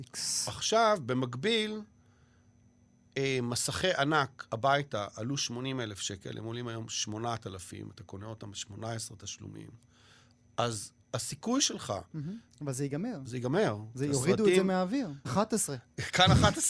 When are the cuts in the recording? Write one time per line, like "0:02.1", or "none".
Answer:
0:12.5
0:15.2